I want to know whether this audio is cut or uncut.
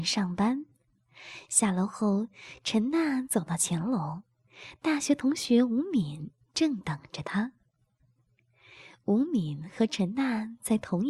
uncut